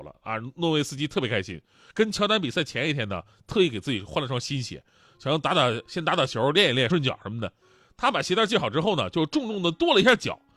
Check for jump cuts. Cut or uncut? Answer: cut